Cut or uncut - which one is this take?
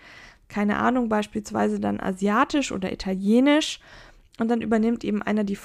uncut